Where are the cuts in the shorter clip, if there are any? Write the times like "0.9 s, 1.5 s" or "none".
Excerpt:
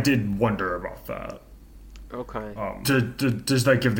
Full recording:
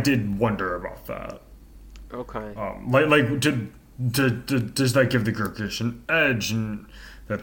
2.8 s